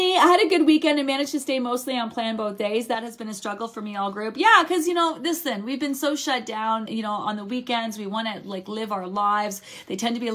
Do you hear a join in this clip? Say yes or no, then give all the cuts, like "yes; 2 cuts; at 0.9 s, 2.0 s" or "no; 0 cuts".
yes; 1 cut; at 6.9 s